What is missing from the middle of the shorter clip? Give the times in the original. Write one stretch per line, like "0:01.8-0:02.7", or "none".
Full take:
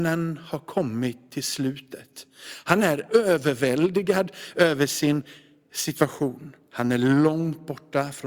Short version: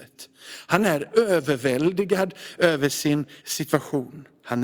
0:05.4-0:05.7